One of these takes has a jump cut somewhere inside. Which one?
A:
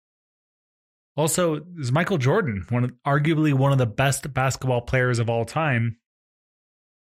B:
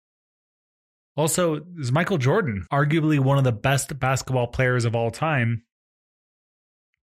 B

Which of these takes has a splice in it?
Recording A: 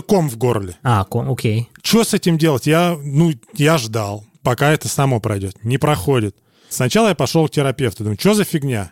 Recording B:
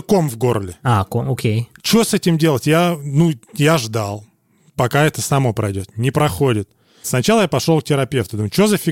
A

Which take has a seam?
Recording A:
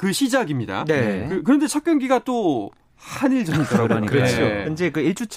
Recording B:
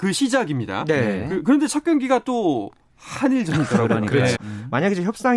B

